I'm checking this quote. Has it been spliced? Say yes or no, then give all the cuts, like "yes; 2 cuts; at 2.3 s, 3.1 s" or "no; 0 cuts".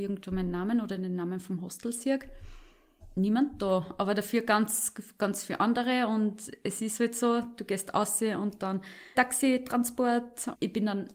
yes; 1 cut; at 9.2 s